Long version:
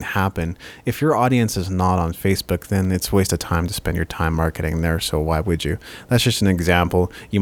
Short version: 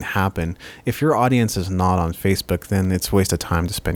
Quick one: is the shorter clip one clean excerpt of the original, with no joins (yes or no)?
yes